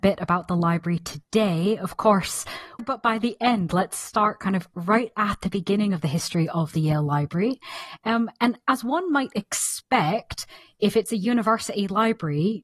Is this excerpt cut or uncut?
cut